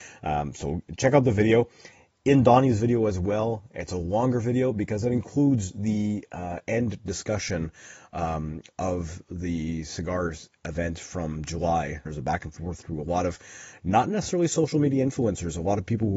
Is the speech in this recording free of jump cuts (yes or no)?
no